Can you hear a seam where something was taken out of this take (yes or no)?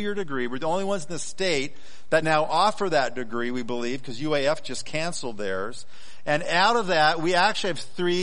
no